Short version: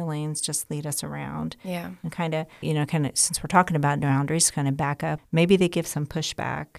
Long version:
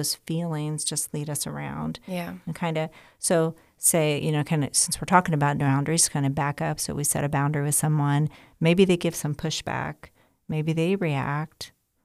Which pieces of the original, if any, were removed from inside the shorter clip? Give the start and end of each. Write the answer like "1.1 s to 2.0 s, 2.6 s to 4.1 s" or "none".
3.1 s to 4.2 s, 6.8 s to 8.5 s